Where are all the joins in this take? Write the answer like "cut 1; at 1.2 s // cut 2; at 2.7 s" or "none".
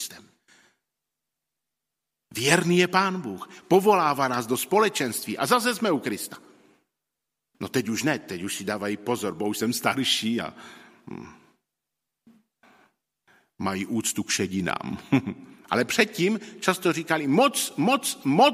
cut 1; at 7.5 s